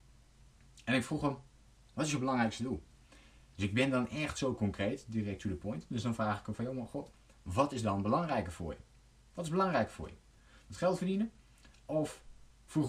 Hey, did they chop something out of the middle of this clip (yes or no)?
yes